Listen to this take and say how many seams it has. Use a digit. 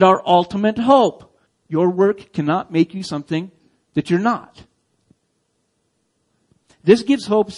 1